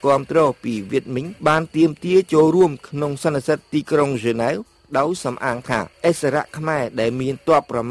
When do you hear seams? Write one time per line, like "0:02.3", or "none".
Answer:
0:01.4